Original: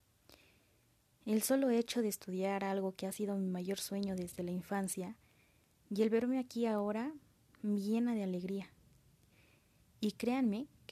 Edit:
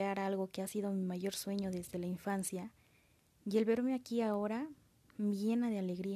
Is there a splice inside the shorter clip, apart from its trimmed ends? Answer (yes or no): no